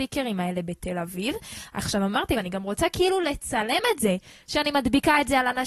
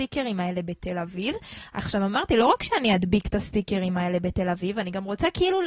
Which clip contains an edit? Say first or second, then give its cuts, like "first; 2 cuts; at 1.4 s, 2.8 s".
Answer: first; 1 cut; at 2.3 s